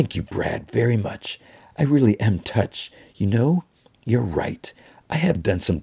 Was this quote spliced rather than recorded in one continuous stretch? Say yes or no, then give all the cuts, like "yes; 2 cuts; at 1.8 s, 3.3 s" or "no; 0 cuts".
no; 0 cuts